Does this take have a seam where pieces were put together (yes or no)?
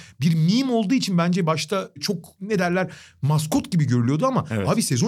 no